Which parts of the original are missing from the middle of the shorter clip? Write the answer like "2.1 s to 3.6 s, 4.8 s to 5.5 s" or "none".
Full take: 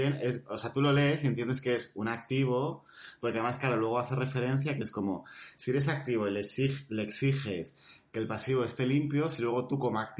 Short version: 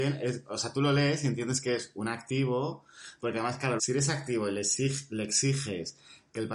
3.8 s to 5.6 s